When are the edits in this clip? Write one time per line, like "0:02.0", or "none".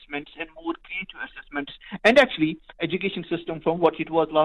0:02.8